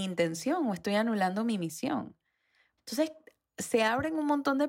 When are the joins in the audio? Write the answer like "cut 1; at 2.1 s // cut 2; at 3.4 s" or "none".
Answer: cut 1; at 2.8 s